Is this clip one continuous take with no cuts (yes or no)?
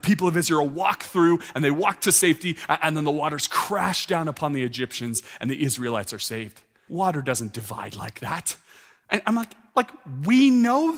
no